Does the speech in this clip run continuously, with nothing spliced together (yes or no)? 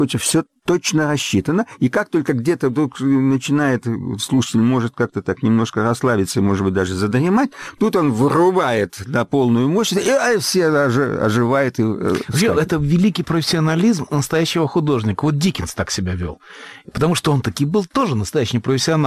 yes